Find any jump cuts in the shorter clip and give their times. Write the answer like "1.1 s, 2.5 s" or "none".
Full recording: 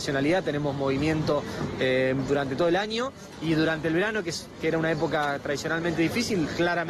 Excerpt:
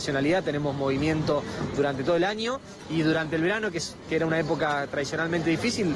1.8 s

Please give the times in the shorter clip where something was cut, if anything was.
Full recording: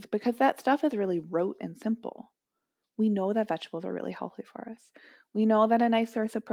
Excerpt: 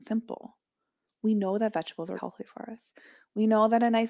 2.2 s

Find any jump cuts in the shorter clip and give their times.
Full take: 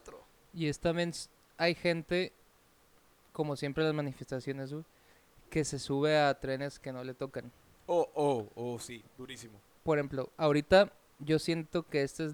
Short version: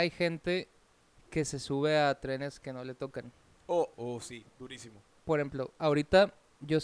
1.1 s, 3.9 s

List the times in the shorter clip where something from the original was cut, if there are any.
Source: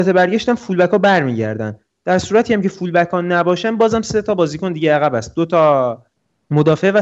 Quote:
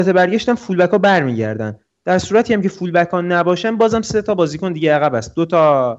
none

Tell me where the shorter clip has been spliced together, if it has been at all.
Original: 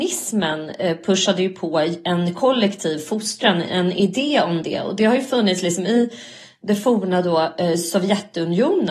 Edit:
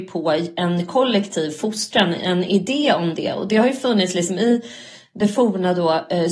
none

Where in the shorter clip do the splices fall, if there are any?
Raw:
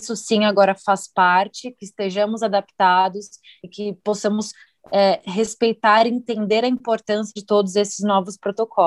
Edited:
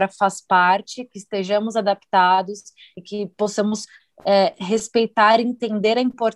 none

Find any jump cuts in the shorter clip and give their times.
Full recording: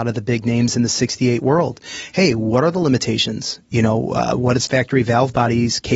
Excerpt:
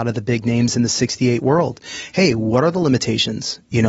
none

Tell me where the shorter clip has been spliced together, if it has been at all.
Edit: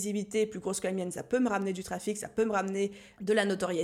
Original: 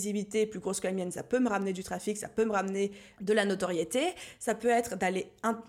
none

